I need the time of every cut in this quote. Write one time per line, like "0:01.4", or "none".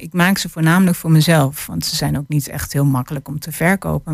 none